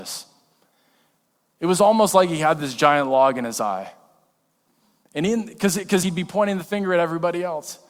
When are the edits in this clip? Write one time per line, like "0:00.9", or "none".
0:06.0